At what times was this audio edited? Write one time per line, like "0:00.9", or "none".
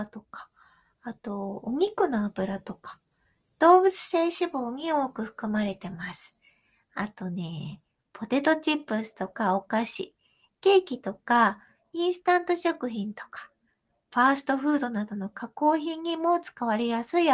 none